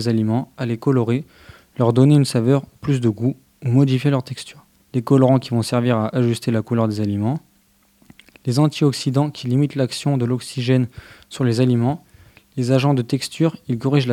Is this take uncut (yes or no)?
no